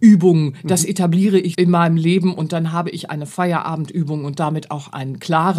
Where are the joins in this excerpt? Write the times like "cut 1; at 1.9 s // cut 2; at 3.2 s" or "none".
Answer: cut 1; at 1.5 s